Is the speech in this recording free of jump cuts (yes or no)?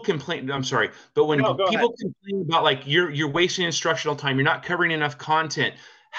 yes